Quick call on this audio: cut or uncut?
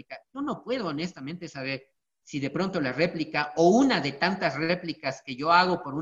uncut